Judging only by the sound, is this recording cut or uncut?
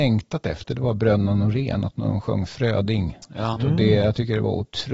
cut